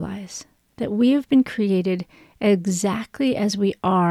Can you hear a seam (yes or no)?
no